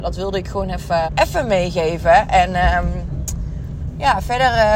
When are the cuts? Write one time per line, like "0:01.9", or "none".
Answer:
0:01.1

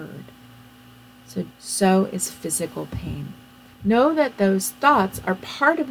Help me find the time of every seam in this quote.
0:01.5
0:03.7

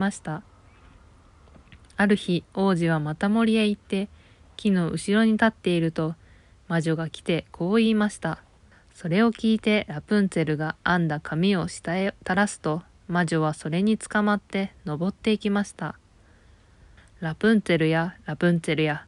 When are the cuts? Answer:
0:08.7
0:17.0

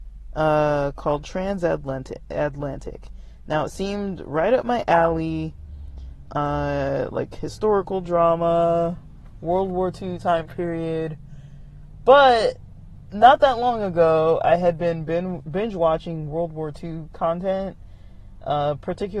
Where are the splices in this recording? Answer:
none

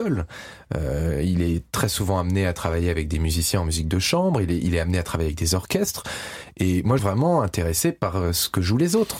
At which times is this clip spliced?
0:07.0

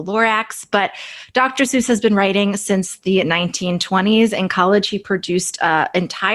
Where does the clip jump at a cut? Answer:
none

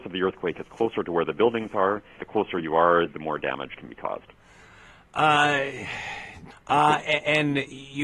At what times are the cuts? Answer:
0:02.2
0:06.5

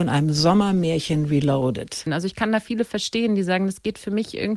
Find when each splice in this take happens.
0:02.1

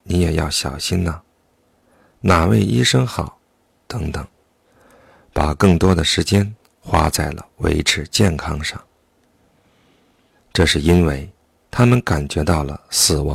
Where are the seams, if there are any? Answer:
0:10.4

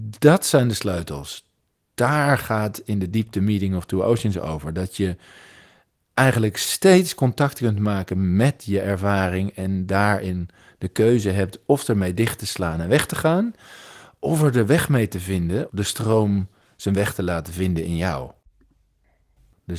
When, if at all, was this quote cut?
0:15.7

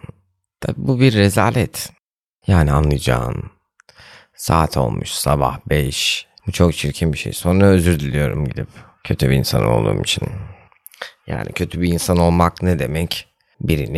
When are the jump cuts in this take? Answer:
0:06.4

